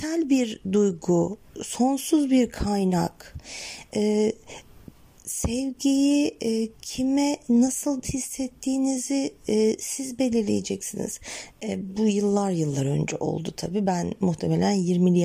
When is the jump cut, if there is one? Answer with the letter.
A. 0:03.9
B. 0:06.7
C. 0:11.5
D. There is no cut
C